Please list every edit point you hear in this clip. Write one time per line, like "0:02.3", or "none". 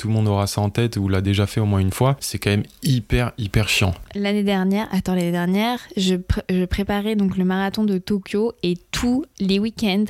none